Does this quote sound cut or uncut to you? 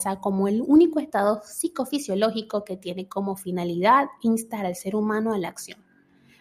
uncut